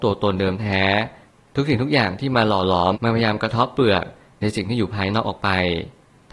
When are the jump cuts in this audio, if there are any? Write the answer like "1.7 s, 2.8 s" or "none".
2.9 s